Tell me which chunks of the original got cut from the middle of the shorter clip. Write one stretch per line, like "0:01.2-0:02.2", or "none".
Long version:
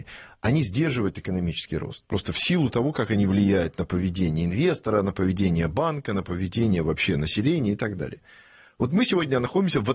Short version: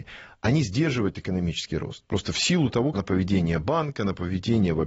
0:02.9-0:05.0